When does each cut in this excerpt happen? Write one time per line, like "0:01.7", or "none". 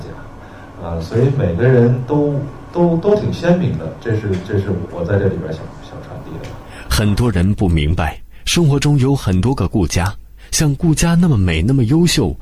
0:04.9